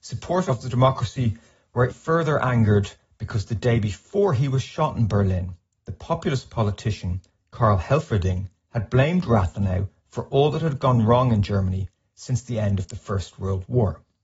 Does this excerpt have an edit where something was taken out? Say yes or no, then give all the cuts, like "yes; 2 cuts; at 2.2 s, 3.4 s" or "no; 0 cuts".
yes; 1 cut; at 1.9 s